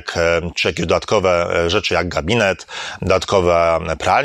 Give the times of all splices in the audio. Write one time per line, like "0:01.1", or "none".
none